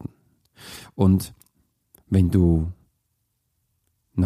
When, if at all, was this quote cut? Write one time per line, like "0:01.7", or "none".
none

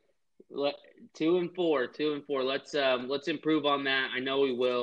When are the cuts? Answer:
none

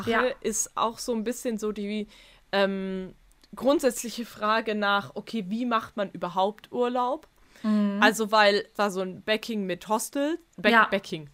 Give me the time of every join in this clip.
0:08.7

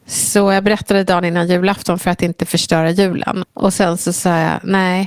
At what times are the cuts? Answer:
0:03.4

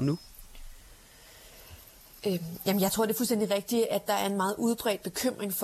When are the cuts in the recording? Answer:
none

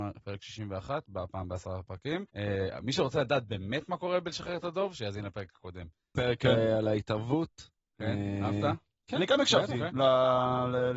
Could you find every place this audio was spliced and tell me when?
0:02.3
0:06.2

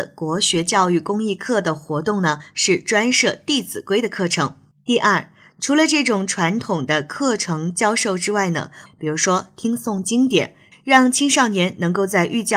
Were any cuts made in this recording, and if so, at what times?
0:04.7
0:08.9
0:10.7

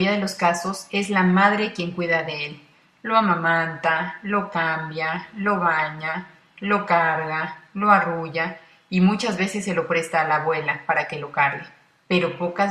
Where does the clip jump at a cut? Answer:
none

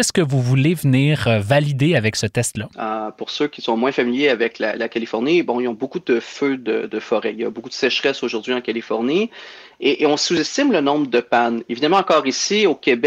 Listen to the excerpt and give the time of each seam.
0:02.7

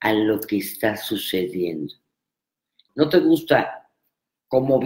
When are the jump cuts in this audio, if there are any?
0:02.9

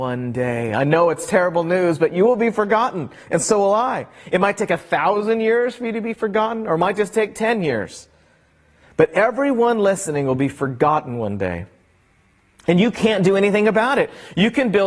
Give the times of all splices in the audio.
none

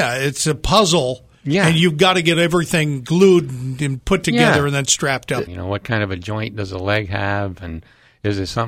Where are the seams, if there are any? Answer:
0:05.5

